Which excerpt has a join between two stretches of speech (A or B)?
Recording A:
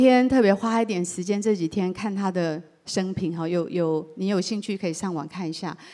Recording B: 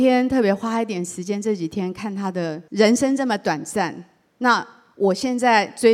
B